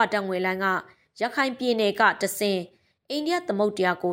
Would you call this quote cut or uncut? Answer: uncut